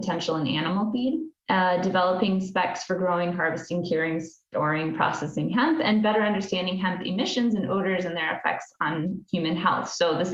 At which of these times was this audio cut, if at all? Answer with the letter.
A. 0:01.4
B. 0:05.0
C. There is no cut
A